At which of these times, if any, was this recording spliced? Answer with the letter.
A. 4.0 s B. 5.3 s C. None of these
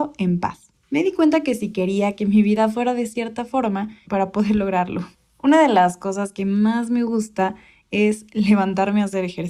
A